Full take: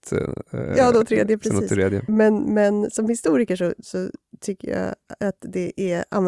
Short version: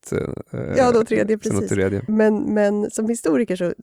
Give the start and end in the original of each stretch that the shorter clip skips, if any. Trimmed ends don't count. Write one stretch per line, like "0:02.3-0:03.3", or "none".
none